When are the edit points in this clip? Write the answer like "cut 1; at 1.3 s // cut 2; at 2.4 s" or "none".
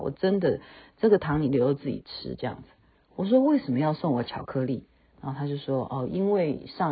cut 1; at 2.9 s

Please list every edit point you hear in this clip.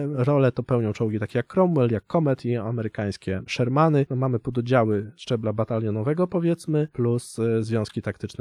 cut 1; at 4.1 s

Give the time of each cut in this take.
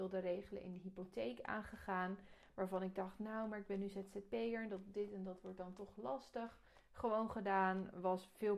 none

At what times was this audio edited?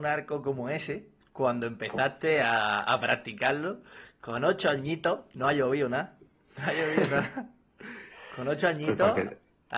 none

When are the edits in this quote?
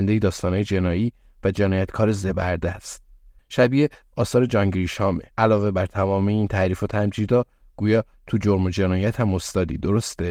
cut 1; at 3.4 s // cut 2; at 5.3 s

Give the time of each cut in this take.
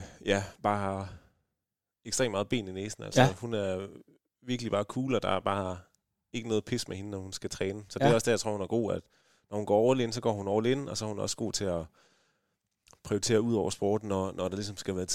none

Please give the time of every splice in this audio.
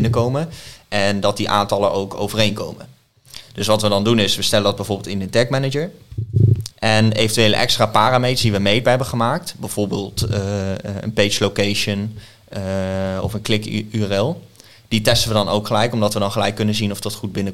cut 1; at 6.7 s

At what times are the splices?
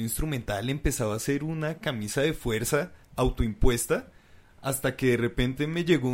none

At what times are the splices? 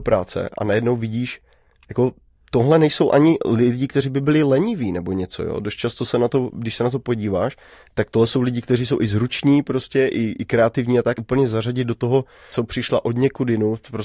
cut 1; at 11.2 s // cut 2; at 12.5 s

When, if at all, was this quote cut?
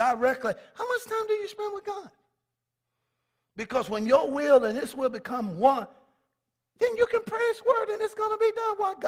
none

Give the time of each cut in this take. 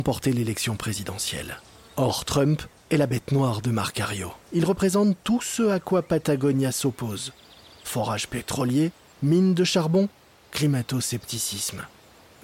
cut 1; at 4.4 s

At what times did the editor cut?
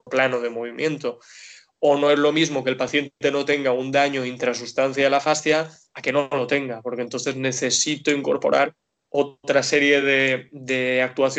none

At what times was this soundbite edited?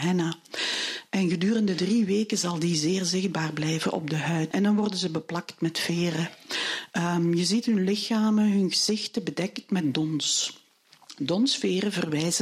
cut 1; at 4.5 s

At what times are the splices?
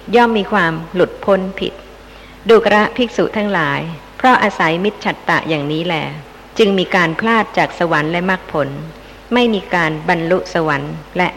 none

